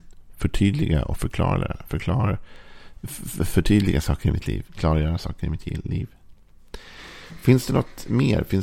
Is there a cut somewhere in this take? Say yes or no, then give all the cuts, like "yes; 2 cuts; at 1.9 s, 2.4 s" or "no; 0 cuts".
no; 0 cuts